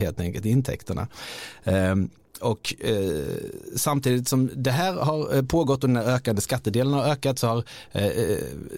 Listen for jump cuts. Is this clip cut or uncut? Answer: uncut